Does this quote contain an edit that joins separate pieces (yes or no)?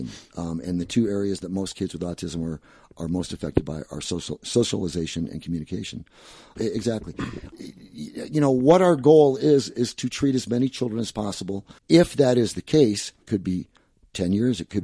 yes